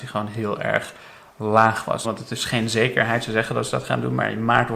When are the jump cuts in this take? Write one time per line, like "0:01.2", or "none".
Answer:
0:02.0